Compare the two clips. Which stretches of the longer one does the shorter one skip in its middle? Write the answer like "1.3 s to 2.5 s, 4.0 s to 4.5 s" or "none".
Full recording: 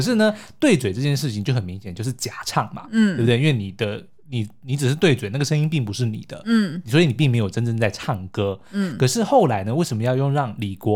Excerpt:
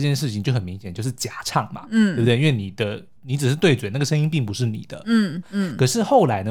4.2 s to 4.6 s, 6.8 s to 8.6 s